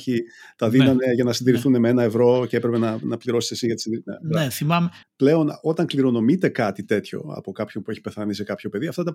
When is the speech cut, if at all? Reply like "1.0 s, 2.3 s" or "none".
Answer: 5.0 s